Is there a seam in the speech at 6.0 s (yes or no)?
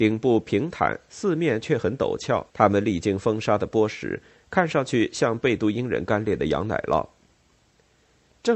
no